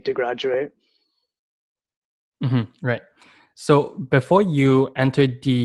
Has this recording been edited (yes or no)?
no